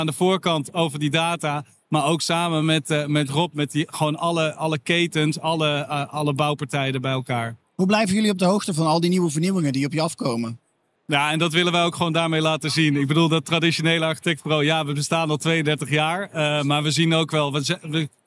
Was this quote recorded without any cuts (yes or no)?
no